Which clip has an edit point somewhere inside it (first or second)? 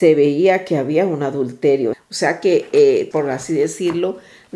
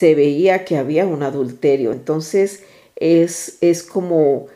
first